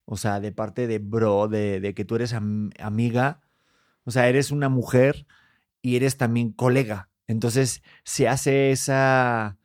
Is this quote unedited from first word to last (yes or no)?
yes